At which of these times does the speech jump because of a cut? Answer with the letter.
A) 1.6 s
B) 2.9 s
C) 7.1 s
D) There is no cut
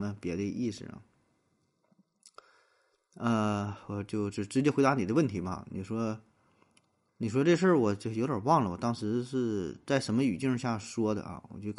C